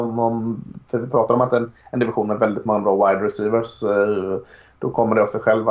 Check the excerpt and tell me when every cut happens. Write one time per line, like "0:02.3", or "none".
none